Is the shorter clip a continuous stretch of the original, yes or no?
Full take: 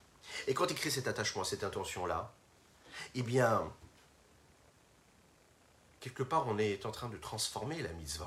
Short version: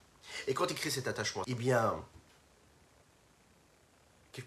no